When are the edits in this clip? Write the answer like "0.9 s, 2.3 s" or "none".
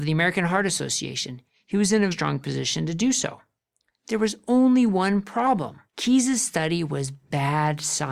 2.1 s, 5.9 s